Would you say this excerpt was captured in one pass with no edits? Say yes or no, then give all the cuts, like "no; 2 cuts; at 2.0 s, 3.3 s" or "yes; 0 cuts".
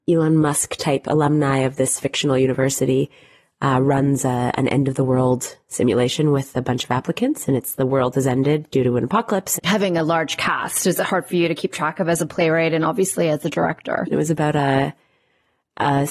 no; 2 cuts; at 9.6 s, 14.0 s